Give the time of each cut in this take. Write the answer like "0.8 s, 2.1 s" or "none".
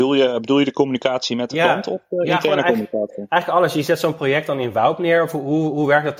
none